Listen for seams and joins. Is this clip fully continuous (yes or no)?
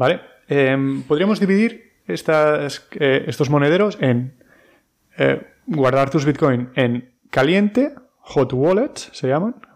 yes